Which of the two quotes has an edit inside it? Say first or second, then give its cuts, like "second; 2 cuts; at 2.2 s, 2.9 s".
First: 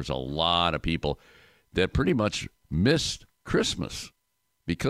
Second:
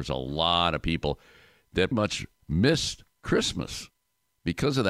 second; 1 cut; at 1.9 s